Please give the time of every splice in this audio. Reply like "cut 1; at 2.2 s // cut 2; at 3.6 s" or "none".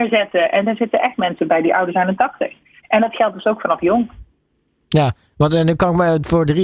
cut 1; at 2.8 s